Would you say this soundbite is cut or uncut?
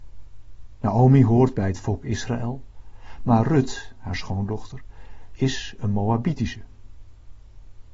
uncut